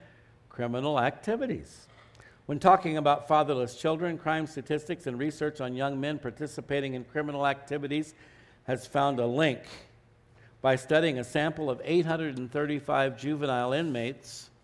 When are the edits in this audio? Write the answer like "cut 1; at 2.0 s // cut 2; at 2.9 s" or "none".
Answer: none